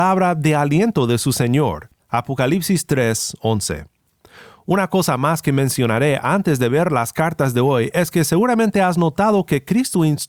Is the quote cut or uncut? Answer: cut